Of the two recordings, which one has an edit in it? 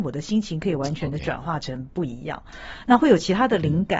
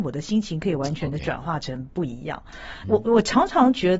second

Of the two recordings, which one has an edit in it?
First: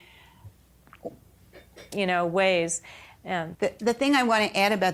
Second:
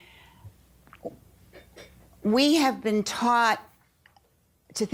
first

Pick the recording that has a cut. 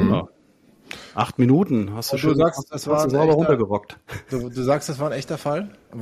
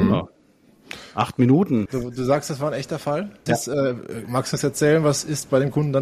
second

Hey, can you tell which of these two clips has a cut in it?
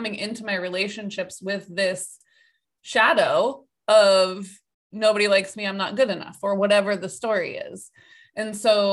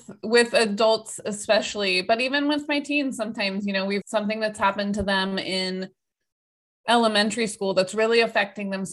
second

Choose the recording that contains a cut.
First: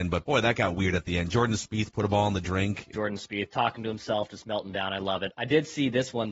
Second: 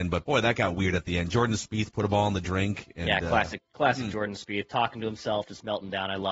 first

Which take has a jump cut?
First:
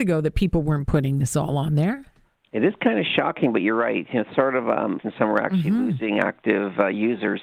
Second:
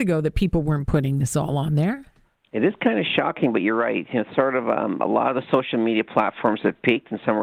first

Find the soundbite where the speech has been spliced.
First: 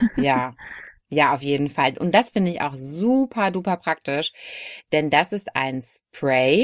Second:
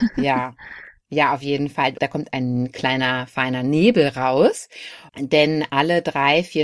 second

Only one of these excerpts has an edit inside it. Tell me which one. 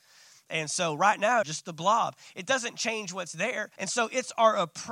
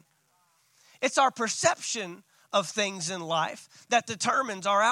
first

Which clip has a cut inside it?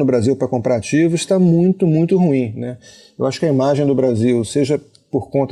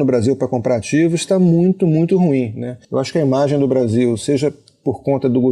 second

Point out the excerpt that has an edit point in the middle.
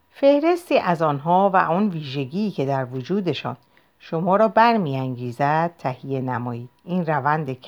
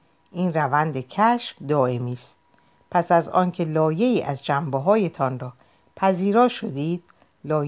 first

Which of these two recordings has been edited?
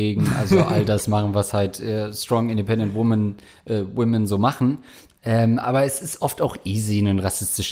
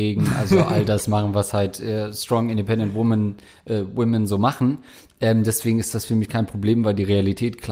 first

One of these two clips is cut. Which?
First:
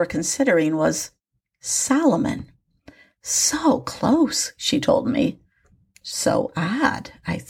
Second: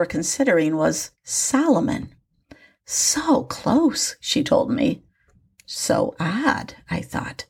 second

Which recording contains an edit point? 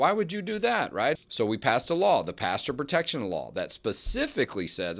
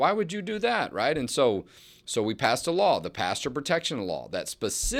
first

